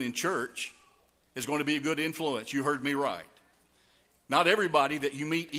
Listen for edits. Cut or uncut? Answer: uncut